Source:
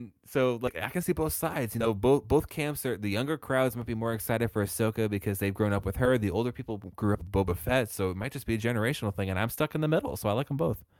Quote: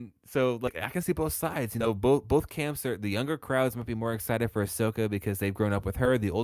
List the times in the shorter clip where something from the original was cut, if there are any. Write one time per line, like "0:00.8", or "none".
none

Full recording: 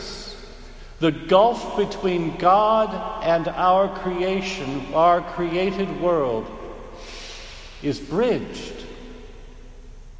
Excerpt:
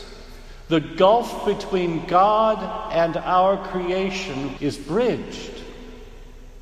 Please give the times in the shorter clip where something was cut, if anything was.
0:04.6

